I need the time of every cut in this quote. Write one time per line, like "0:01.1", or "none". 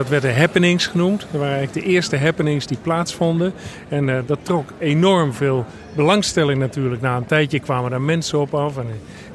none